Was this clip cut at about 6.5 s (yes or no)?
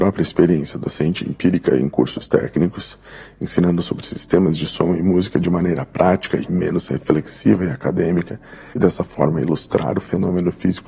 yes